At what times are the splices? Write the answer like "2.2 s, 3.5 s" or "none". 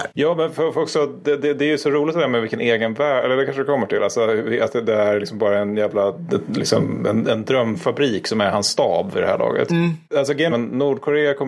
7.2 s, 10.5 s